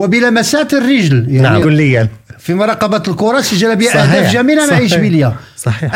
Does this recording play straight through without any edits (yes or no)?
no